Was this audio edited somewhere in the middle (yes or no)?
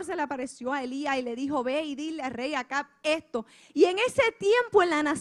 yes